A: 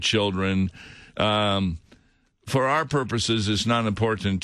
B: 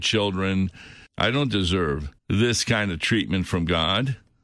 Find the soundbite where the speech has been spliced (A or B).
B